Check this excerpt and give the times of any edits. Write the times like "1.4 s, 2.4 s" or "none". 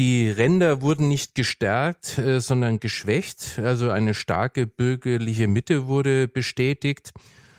none